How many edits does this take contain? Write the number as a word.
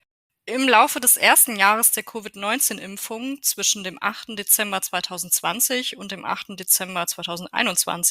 zero